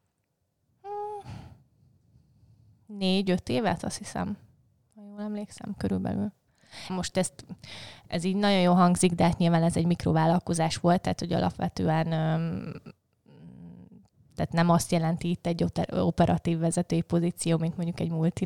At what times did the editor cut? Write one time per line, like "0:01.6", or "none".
0:06.9